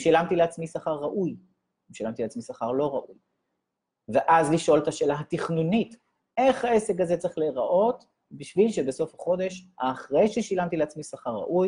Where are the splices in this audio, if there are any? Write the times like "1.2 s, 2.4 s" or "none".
none

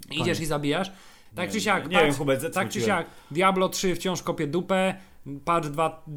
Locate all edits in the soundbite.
1.3 s, 2.5 s

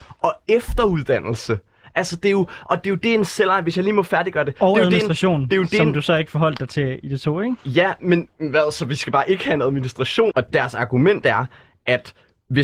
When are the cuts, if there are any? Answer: 10.3 s

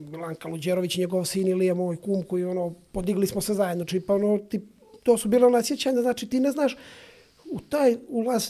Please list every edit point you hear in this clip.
none

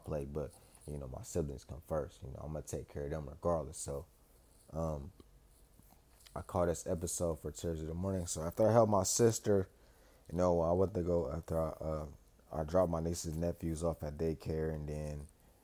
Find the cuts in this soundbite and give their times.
none

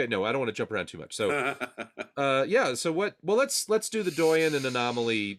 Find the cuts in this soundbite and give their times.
none

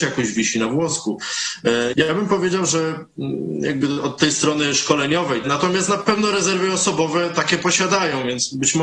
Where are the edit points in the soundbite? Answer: 1.9 s, 5.4 s

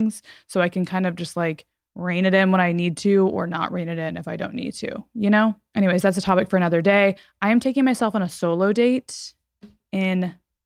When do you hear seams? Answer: none

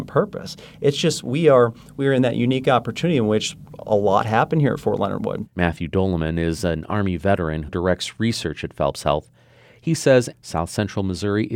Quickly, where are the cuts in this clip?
5.5 s, 7.7 s, 10.3 s

